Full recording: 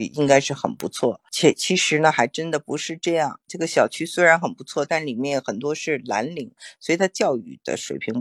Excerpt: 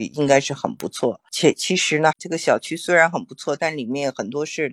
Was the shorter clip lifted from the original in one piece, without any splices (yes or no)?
no